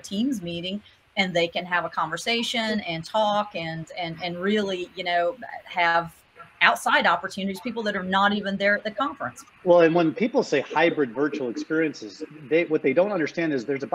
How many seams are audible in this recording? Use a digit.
0